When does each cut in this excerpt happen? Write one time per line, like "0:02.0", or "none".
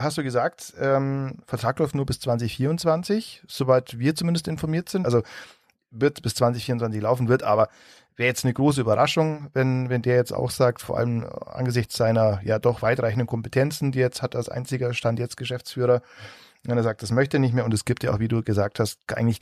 0:05.0